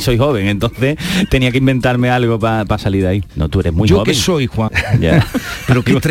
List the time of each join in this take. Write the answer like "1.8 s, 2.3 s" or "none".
3.3 s, 4.7 s